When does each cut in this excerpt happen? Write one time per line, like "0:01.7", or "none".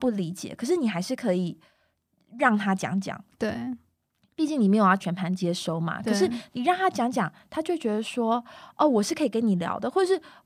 none